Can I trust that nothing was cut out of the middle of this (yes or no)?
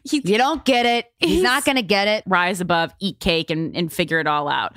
no